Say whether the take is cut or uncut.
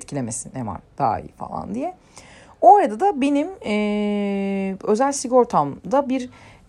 uncut